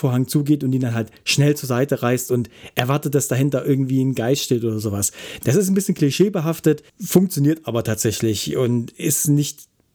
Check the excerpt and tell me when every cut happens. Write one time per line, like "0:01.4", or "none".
0:05.4
0:06.9